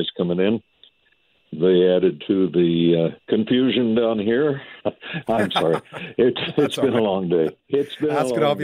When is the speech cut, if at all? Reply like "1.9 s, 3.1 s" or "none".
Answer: 1.3 s, 3.2 s, 4.8 s